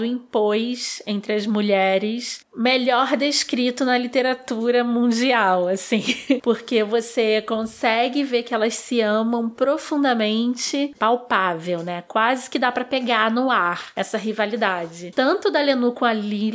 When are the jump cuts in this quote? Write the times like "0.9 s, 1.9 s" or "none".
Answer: 10.9 s